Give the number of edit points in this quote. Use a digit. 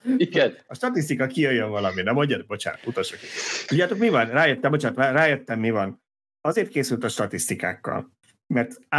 1